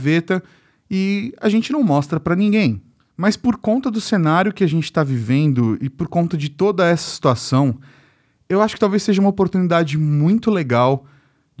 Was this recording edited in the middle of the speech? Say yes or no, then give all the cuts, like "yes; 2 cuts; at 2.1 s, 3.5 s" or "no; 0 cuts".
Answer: no; 0 cuts